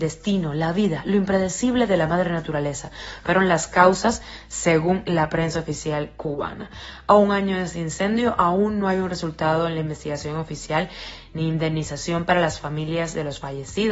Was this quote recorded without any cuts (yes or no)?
yes